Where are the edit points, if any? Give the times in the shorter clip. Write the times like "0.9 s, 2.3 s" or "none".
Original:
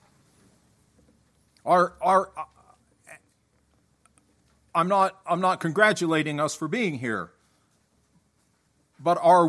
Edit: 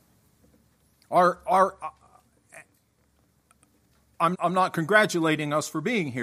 4.3 s